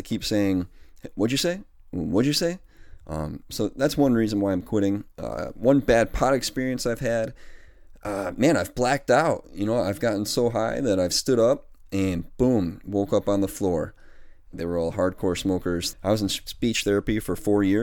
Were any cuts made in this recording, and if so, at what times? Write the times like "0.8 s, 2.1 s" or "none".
14.5 s, 15.9 s

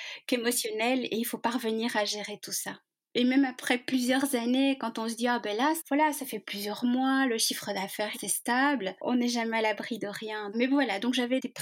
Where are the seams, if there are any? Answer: 8.1 s, 10.5 s

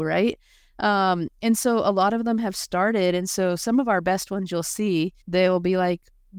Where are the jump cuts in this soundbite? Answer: 5.2 s

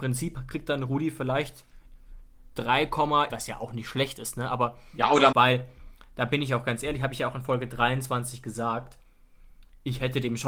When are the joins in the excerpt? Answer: 3.3 s, 5.3 s

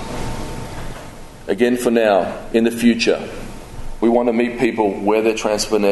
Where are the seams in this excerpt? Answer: none

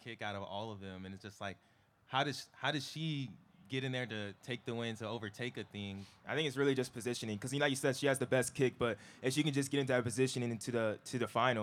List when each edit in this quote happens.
6.2 s

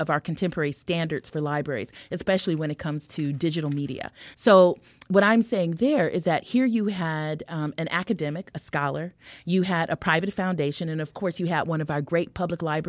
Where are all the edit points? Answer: 4.3 s

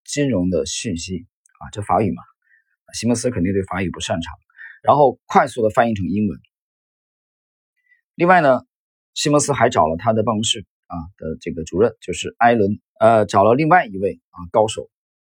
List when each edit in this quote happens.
12.9 s

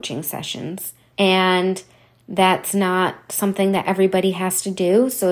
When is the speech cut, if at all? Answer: 1.1 s

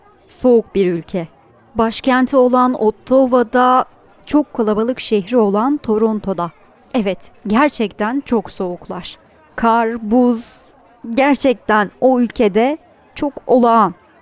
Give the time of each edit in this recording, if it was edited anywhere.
none

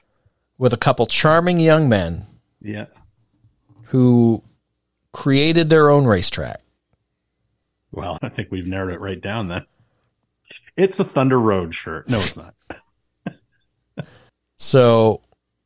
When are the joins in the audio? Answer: 8.2 s

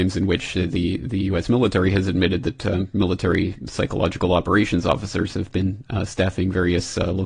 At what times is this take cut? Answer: none

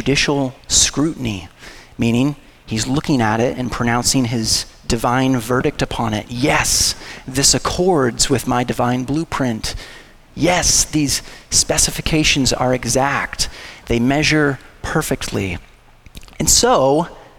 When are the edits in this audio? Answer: none

